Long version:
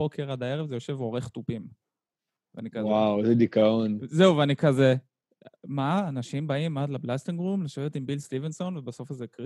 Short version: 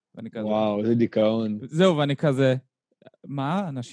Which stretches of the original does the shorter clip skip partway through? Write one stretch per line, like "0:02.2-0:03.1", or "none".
none